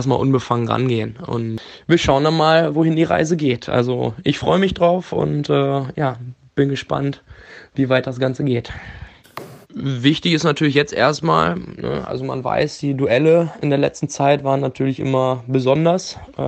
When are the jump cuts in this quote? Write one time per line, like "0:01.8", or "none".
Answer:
0:09.6

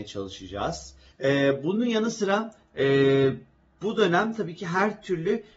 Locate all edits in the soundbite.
0:01.1

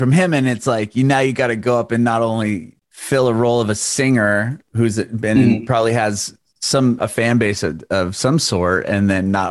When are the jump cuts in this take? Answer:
0:02.8
0:07.0

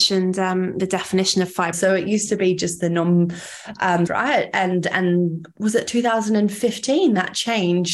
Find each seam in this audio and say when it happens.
0:01.7
0:04.1

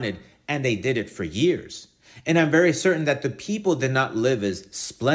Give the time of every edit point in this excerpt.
none

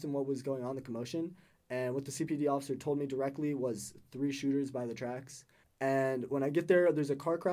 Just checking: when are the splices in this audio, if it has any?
0:05.6

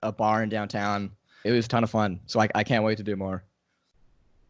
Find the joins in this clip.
0:01.4

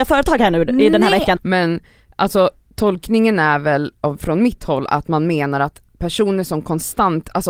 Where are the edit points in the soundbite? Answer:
0:01.4

